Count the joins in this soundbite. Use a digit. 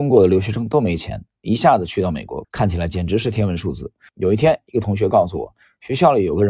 2